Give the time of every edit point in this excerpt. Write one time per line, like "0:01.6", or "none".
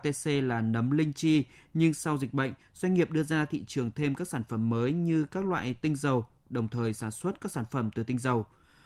none